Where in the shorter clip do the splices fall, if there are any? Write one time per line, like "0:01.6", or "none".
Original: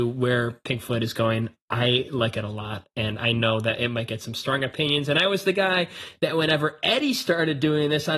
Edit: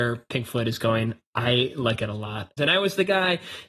0:02.6

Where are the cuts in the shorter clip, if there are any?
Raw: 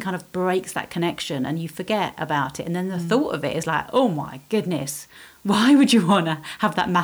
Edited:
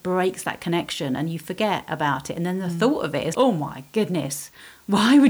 0:03.3

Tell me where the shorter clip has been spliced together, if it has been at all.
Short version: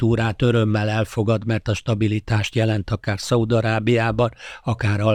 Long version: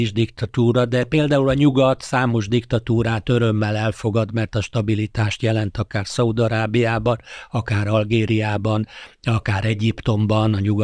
none

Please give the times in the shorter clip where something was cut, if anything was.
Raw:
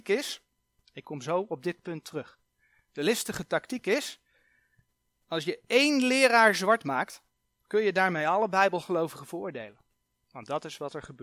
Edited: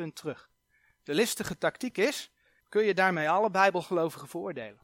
0:02.6

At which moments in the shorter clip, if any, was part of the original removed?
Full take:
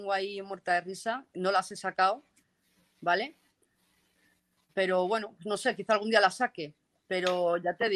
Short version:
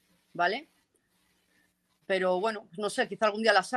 none

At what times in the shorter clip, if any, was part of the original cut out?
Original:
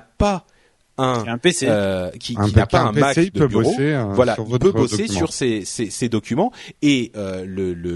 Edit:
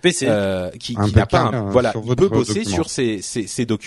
0:01.5

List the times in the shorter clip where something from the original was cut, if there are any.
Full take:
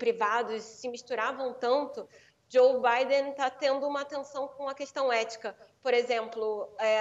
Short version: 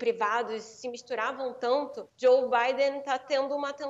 0:02.1

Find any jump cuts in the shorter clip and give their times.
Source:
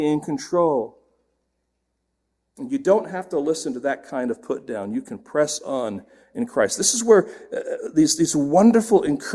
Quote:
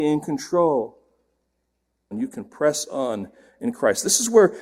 0:02.1

